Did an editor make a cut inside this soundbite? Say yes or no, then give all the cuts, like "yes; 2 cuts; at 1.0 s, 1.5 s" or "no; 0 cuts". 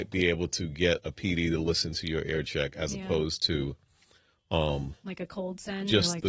no; 0 cuts